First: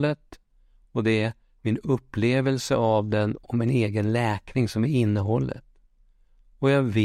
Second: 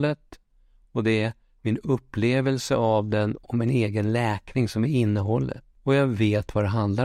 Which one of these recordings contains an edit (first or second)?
second